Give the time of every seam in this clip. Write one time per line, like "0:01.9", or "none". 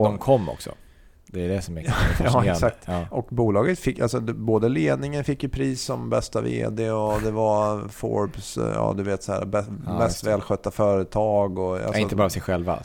none